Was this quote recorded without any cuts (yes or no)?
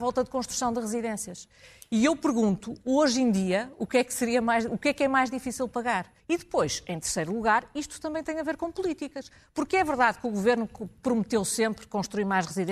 no